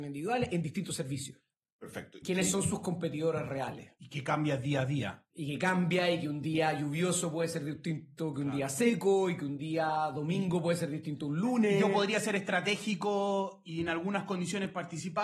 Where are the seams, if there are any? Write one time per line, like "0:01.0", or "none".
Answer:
0:02.2